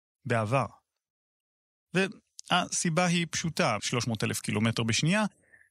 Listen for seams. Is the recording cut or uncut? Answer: cut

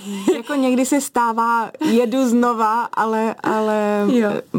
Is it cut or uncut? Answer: uncut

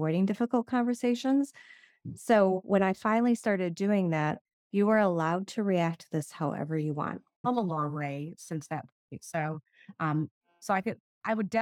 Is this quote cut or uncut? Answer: cut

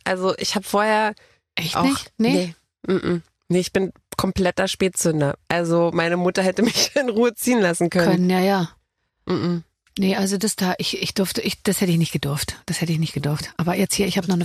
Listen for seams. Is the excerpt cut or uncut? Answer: uncut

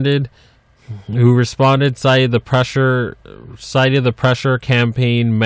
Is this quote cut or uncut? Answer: uncut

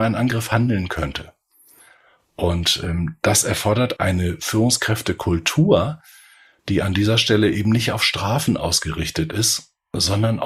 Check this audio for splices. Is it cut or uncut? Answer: cut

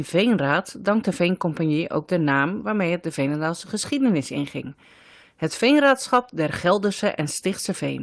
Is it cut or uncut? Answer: uncut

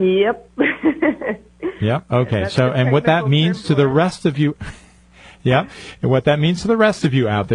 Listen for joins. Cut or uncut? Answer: uncut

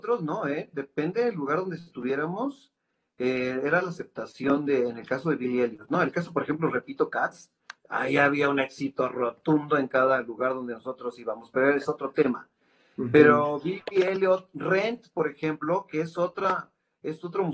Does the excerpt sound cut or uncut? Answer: uncut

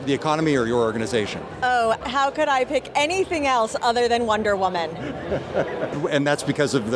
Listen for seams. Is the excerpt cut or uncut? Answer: cut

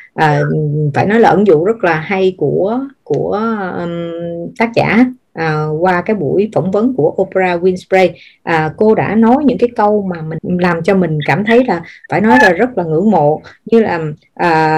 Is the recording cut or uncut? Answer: cut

